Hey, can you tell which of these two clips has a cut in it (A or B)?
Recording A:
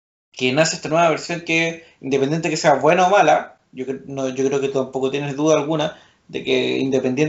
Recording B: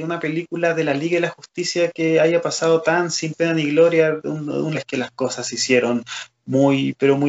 B